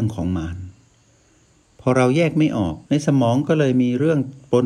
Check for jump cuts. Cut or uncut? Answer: cut